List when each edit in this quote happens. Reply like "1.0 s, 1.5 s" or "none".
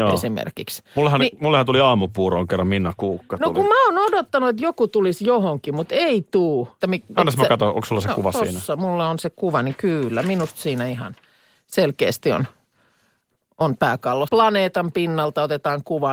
6.8 s, 14.3 s